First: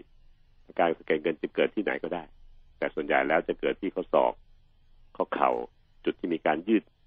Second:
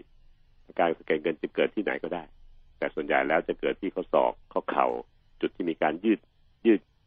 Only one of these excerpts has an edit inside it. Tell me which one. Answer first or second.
second